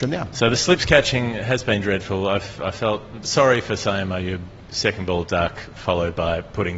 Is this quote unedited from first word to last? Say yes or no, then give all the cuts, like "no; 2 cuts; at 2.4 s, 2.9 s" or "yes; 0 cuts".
yes; 0 cuts